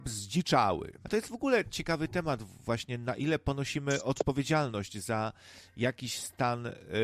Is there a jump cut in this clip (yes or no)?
yes